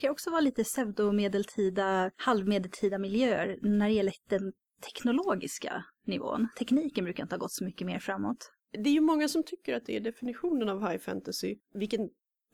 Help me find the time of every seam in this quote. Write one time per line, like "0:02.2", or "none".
none